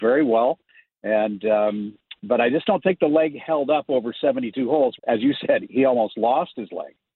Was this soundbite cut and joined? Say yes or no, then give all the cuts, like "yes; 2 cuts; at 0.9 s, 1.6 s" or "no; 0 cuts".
yes; 1 cut; at 5.0 s